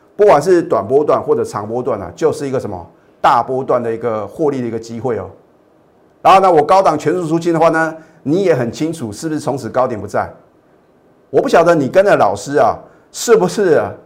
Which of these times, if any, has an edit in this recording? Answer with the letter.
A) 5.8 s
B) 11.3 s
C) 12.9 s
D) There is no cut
B